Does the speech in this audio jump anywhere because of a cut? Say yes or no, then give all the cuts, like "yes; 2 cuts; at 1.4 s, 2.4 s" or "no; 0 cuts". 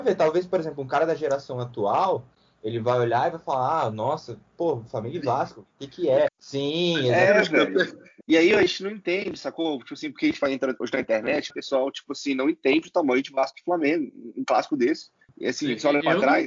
yes; 3 cuts; at 6.3 s, 8.2 s, 11.5 s